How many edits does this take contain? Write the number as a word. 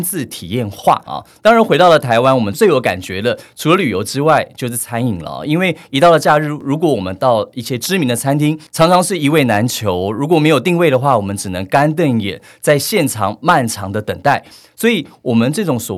one